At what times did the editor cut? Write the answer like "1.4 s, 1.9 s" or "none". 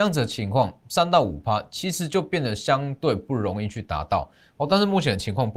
none